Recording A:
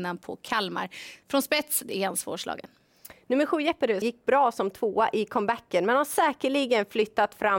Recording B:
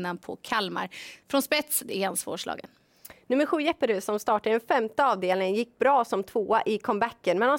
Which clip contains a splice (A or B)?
A